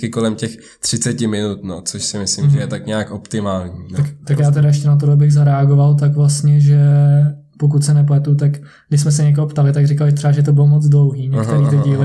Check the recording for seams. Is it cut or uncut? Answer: uncut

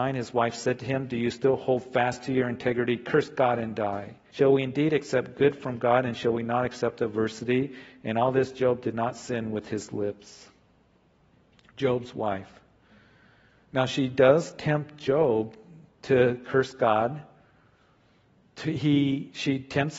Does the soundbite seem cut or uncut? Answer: cut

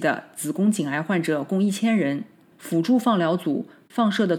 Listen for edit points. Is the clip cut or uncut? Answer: cut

